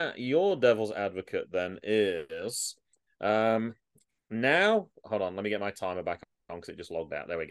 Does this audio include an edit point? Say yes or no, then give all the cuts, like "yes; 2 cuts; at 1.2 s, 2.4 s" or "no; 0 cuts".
no; 0 cuts